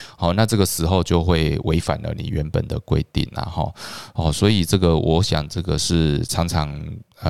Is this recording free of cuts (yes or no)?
yes